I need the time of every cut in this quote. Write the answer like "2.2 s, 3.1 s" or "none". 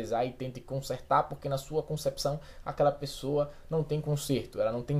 none

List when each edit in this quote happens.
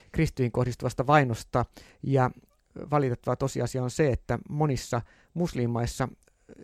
none

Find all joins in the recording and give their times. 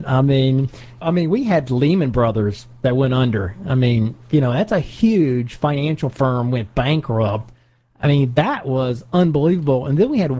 1.0 s

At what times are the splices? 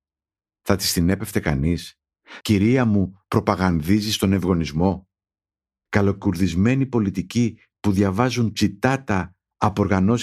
2.4 s, 5.9 s

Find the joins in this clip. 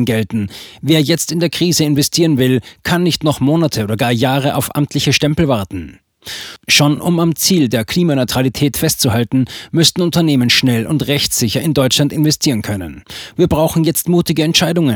none

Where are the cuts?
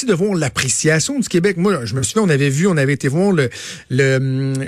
none

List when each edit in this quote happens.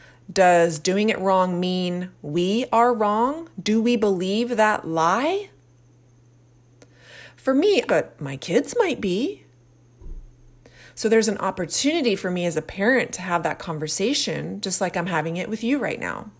7.9 s

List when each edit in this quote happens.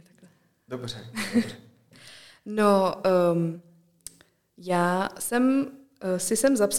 none

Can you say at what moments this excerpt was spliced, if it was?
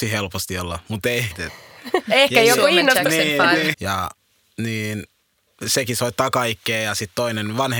1.3 s, 3.7 s

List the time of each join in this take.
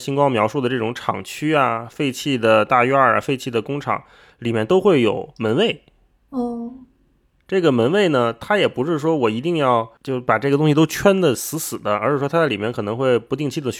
none

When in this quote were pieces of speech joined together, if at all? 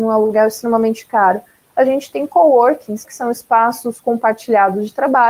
3.0 s

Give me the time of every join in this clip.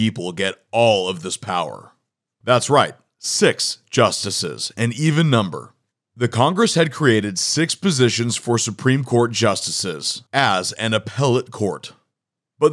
2.4 s

